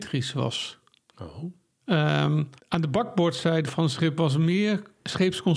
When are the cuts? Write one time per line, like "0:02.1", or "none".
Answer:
0:02.6